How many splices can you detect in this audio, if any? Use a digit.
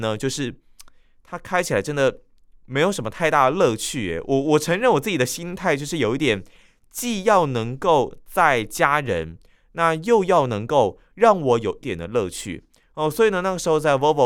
1